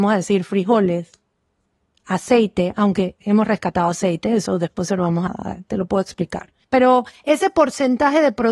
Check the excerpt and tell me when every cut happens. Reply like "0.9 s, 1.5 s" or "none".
5.3 s, 6.6 s